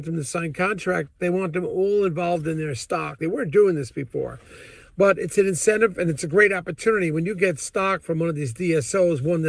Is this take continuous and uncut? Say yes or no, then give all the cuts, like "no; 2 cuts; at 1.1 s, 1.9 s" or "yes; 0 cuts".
no; 1 cut; at 3.2 s